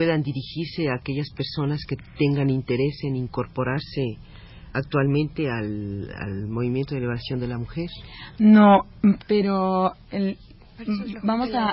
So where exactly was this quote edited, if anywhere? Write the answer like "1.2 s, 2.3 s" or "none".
9.2 s